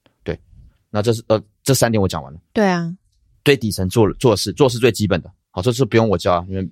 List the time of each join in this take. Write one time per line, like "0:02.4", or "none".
0:02.5